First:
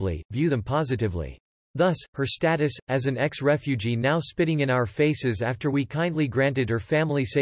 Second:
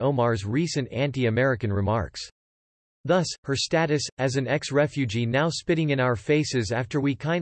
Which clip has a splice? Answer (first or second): first